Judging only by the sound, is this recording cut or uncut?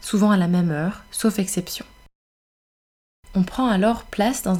uncut